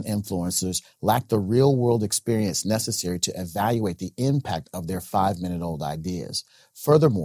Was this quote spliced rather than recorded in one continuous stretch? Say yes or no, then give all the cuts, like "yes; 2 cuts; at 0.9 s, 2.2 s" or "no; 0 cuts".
no; 0 cuts